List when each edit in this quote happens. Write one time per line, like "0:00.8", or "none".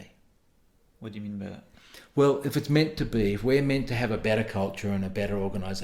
none